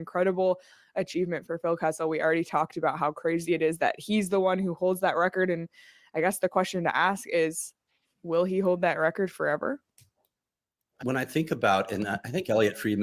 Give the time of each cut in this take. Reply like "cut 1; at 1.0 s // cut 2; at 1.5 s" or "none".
cut 1; at 11.0 s